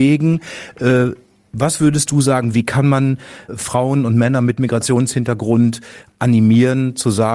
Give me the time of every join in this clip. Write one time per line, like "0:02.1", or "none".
0:03.5